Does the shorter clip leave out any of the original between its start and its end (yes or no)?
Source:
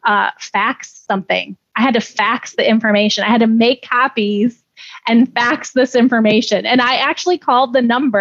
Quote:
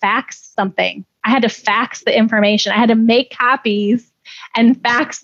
no